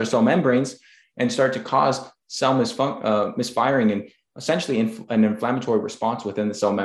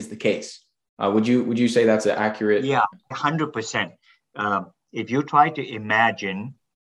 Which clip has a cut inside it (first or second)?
second